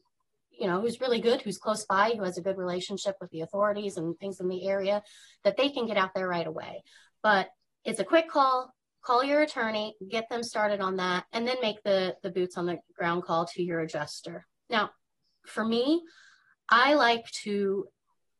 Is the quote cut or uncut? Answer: cut